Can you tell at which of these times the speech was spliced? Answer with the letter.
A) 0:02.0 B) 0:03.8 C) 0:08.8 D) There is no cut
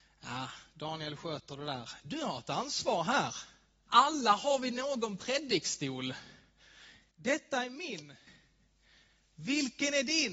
B